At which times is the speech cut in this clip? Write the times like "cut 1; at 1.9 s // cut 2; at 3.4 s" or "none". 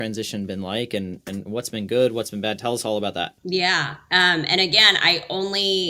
cut 1; at 3.4 s